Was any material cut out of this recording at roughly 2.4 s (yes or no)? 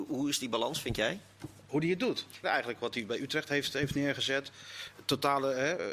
yes